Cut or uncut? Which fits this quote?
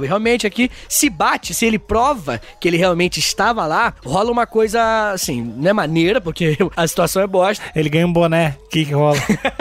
uncut